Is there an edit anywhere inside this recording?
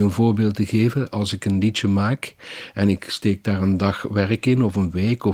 no; 0 cuts

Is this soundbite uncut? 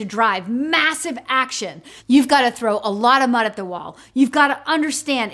no; 1 cut; at 2.0 s

